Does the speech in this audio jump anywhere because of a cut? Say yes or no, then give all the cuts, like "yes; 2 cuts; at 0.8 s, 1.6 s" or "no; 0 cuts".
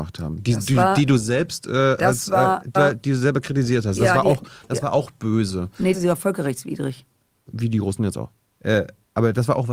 yes; 2 cuts; at 2.8 s, 5.9 s